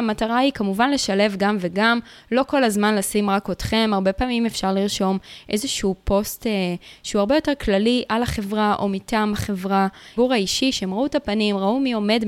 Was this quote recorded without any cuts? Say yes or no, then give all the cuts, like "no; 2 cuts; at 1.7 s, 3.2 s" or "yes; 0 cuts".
no; 1 cut; at 10.2 s